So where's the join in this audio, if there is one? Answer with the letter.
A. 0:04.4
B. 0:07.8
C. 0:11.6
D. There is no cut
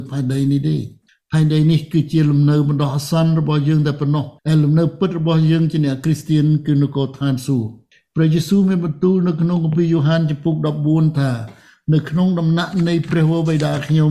A